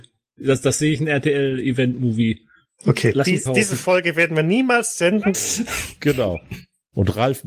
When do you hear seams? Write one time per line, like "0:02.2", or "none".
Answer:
0:03.5
0:05.3